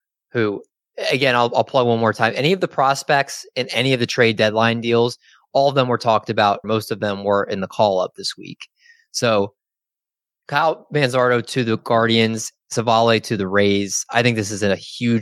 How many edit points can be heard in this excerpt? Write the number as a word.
one